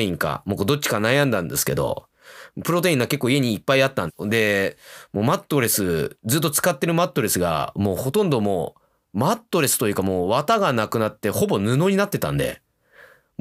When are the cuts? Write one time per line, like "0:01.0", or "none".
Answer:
0:04.1